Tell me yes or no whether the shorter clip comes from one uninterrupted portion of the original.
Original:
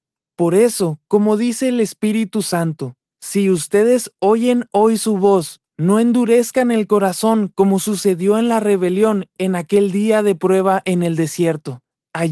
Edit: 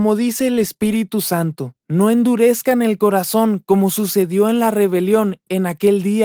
no